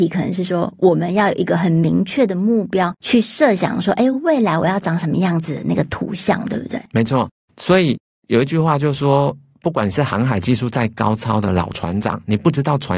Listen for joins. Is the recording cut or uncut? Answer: uncut